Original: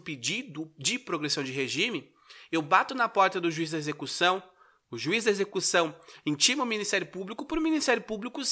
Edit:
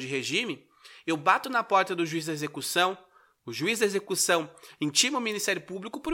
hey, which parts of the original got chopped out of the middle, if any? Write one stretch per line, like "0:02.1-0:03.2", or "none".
none